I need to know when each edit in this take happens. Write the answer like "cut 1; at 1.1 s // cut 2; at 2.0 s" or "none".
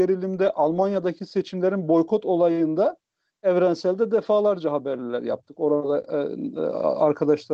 none